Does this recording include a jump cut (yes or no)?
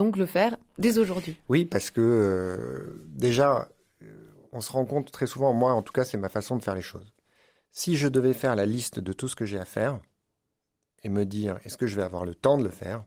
no